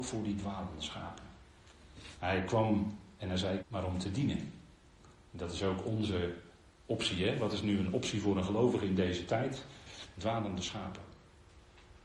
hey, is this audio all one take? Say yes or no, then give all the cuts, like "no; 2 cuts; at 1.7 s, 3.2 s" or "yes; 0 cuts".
no; 2 cuts; at 3.6 s, 10.1 s